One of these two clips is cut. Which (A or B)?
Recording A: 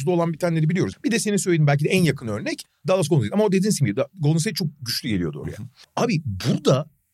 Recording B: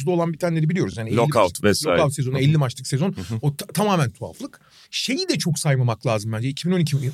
A